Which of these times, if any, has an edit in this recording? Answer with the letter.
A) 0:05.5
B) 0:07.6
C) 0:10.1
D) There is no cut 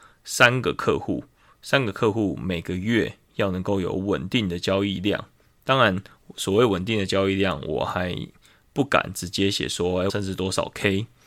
C